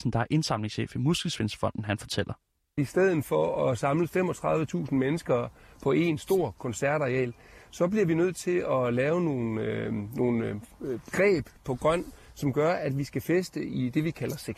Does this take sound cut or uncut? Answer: uncut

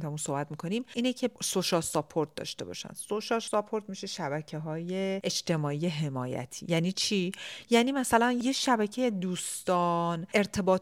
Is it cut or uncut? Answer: uncut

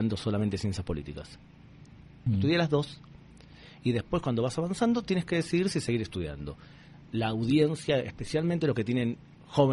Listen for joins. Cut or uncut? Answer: cut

